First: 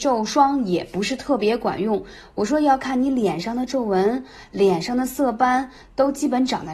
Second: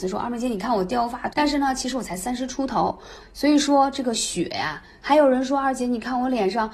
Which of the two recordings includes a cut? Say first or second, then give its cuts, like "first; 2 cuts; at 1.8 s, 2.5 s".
second; 3 cuts; at 1.3 s, 3.2 s, 5.0 s